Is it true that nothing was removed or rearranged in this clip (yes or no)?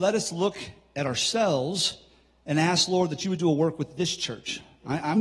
yes